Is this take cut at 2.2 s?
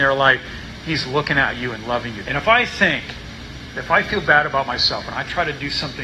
yes; 1 cut; at 2.2 s

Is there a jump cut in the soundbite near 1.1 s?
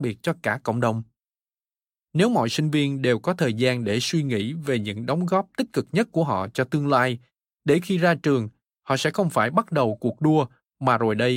no; 0 cuts

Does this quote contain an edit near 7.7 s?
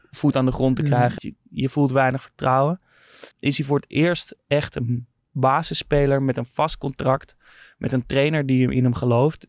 no; 2 cuts; at 1.2 s, 3.3 s

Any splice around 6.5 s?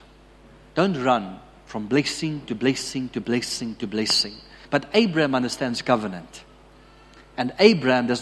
no; 1 cut; at 4.7 s

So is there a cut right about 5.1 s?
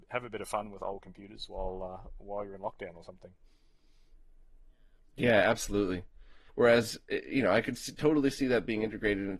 no; 1 cut; at 6.5 s

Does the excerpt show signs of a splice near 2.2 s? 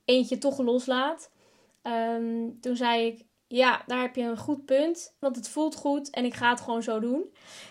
no; 1 cut; at 5.2 s

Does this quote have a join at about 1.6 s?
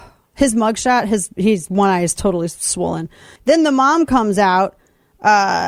no; 1 cut; at 3.4 s

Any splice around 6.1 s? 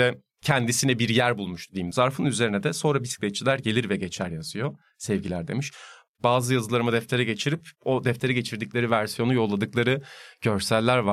yes; 2 cuts; at 1.9 s, 6.1 s

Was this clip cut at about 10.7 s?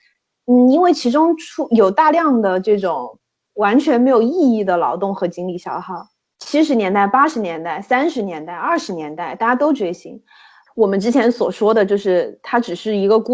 yes; 2 cuts; at 6.2 s, 10.7 s

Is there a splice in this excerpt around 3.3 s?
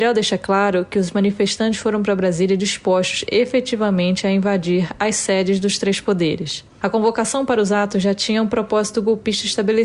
no; 1 cut; at 6.8 s

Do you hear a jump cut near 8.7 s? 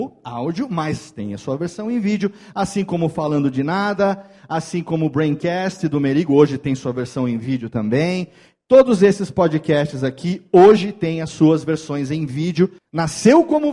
no; 1 cut; at 12.8 s

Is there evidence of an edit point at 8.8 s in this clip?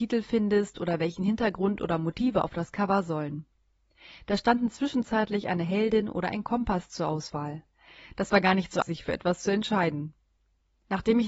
yes; 1 cut; at 8.8 s

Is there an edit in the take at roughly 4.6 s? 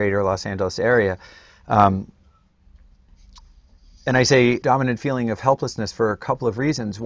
yes; 1 cut; at 4.6 s

